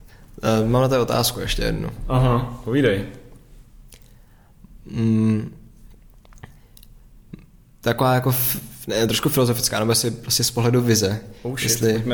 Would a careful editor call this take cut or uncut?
uncut